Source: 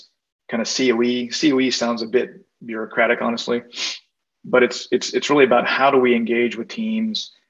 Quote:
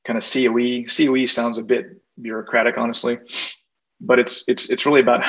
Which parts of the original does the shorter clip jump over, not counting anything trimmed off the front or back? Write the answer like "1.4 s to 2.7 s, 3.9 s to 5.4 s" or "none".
none